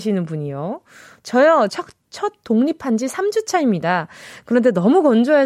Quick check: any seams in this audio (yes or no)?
yes